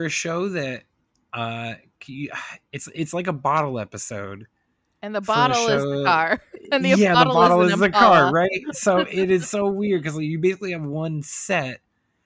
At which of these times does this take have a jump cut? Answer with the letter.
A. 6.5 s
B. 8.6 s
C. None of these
C